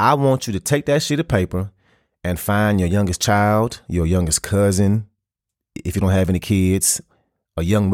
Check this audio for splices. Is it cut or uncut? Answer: uncut